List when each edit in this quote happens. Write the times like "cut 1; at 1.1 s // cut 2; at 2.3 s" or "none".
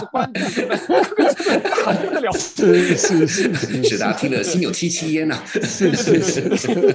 none